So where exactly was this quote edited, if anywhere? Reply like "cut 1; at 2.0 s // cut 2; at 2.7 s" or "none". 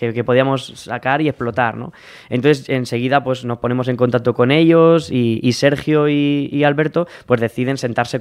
none